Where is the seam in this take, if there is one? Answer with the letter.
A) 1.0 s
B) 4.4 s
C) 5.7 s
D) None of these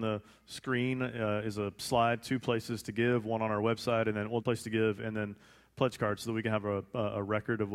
B